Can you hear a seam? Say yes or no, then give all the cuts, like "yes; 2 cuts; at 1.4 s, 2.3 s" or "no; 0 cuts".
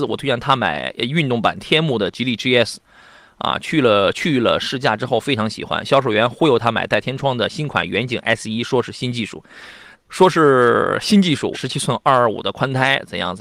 yes; 2 cuts; at 9.9 s, 11.5 s